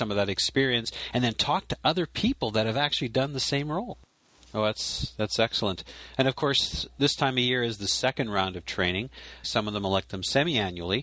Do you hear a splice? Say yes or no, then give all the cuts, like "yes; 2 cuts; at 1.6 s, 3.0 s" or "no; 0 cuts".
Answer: yes; 2 cuts; at 4.4 s, 9.4 s